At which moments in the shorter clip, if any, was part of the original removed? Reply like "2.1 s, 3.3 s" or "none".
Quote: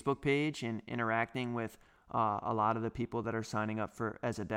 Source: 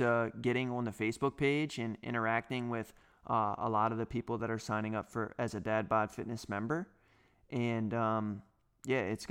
none